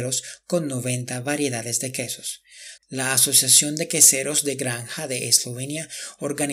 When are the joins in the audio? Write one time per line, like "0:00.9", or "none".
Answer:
0:02.8